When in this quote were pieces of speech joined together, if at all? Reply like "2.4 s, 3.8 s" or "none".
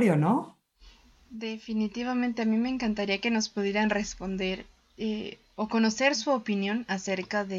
none